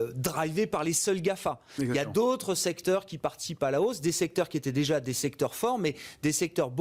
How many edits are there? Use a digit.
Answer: 0